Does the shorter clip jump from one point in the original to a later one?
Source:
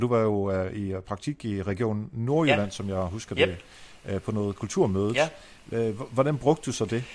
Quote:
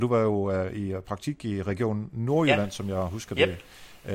no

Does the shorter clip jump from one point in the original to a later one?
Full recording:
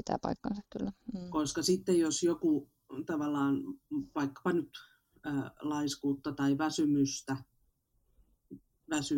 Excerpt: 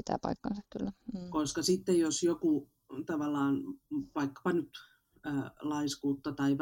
no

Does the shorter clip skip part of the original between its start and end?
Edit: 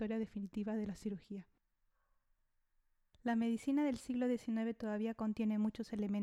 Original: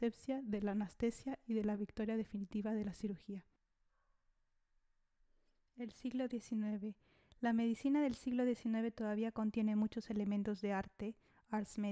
yes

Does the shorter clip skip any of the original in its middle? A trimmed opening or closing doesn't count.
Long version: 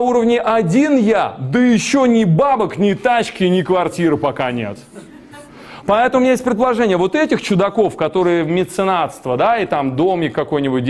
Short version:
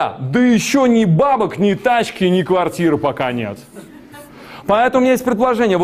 no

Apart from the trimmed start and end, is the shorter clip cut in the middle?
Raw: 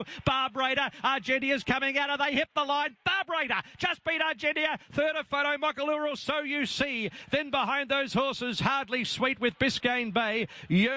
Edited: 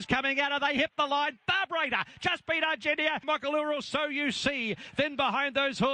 yes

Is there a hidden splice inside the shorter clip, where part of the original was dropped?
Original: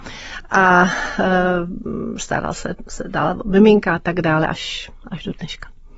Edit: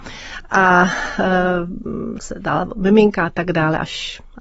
yes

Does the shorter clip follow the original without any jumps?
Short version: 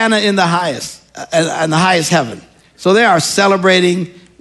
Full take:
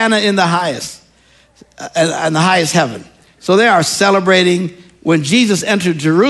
no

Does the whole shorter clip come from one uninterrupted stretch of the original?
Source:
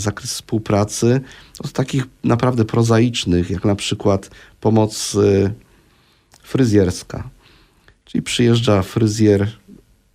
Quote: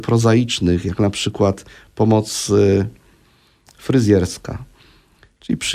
yes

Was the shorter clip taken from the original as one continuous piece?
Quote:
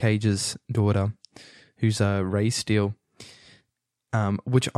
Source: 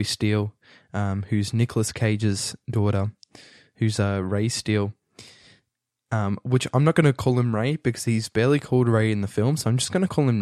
yes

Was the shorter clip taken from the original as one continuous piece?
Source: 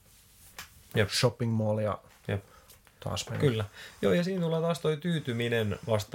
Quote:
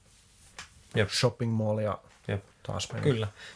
no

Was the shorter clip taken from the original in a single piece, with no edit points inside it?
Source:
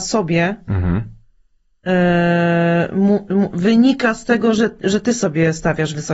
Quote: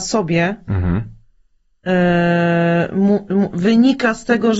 yes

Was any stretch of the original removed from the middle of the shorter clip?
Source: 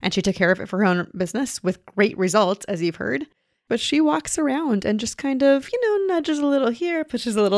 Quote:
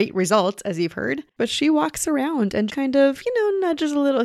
yes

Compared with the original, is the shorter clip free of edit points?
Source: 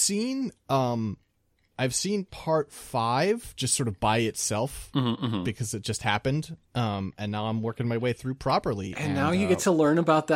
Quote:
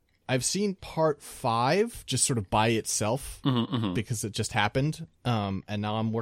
yes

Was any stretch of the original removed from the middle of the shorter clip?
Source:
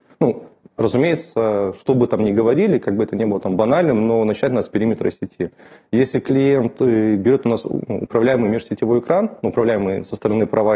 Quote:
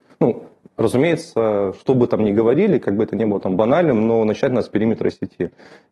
no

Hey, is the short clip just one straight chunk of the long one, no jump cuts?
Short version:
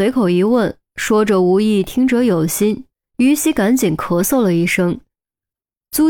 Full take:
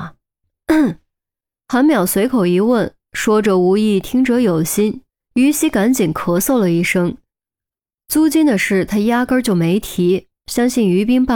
yes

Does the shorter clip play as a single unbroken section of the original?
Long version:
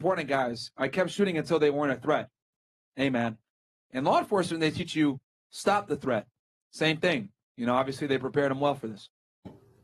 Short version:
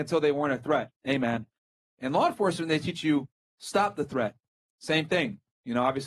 no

